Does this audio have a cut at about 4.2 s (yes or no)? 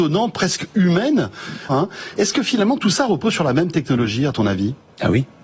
no